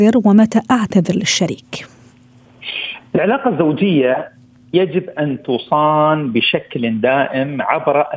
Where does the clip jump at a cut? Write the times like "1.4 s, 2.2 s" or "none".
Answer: none